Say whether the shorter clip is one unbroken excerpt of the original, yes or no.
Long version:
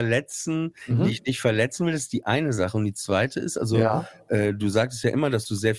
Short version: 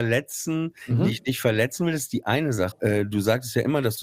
no